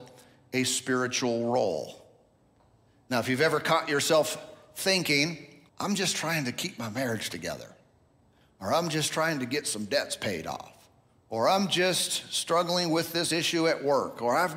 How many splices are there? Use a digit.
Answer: 1